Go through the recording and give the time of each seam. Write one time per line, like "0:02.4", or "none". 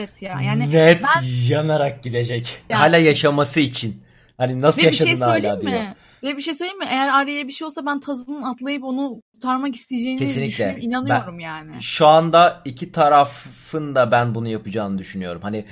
0:02.7